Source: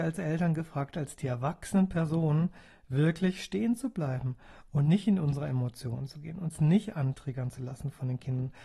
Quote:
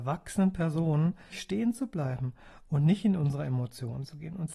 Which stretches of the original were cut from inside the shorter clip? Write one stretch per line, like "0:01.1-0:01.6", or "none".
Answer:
0:02.7-0:03.3